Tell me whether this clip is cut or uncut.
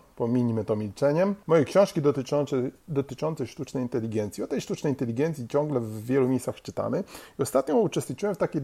cut